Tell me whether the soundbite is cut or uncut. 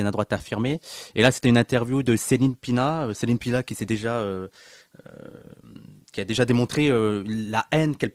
uncut